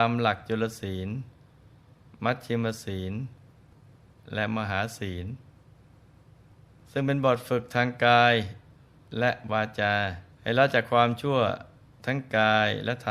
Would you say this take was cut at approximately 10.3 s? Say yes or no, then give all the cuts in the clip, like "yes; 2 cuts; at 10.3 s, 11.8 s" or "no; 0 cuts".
yes; 1 cut; at 10.3 s